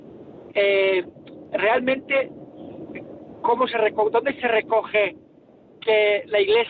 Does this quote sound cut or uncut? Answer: uncut